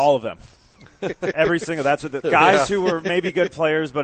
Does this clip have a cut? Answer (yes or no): yes